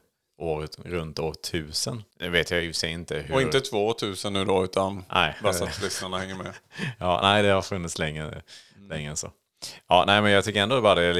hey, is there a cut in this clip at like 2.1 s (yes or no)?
yes